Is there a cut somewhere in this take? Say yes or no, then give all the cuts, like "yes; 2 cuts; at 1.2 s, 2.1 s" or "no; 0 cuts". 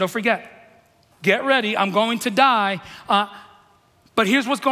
yes; 1 cut; at 1.1 s